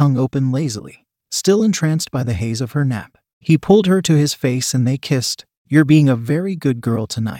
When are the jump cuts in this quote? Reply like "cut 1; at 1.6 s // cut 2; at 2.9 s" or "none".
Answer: none